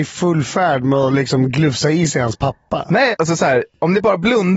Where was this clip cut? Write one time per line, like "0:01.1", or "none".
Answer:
0:03.1